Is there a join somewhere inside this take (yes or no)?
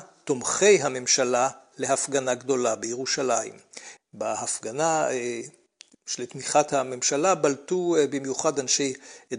yes